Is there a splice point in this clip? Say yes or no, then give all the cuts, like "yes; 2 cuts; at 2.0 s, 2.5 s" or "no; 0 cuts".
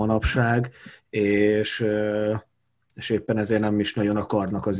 no; 0 cuts